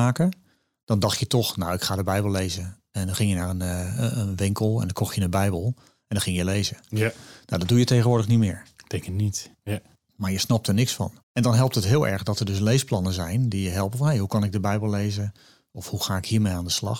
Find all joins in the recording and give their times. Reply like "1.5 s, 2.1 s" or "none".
9.5 s, 11.2 s